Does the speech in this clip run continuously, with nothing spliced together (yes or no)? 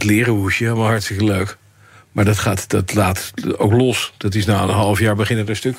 yes